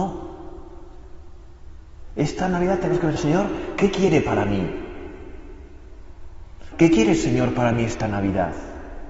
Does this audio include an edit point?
yes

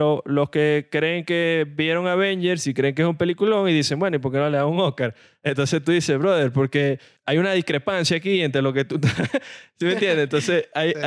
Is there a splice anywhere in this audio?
no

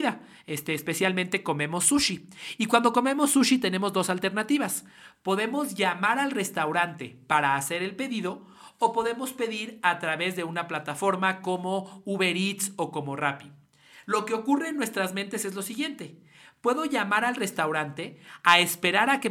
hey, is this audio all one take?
yes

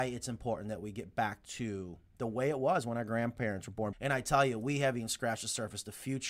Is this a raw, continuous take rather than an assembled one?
no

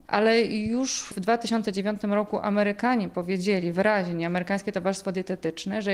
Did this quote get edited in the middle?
no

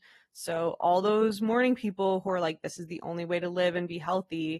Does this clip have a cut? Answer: no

